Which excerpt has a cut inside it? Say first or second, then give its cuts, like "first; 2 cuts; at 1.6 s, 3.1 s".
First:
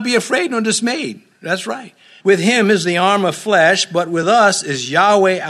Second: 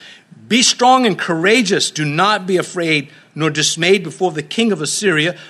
first; 1 cut; at 2.2 s